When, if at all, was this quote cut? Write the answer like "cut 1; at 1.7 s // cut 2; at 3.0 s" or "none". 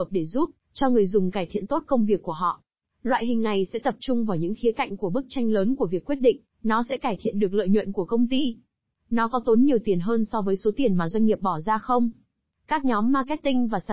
cut 1; at 2.8 s